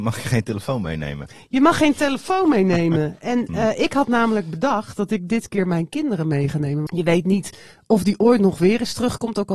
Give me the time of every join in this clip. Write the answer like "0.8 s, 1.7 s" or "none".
6.9 s